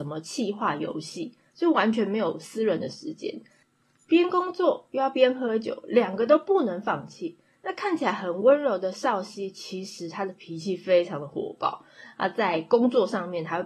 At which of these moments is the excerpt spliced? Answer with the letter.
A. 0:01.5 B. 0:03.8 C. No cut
A